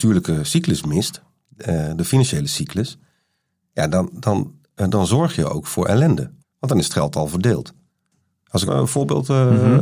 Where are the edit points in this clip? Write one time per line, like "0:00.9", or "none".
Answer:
0:06.4
0:08.7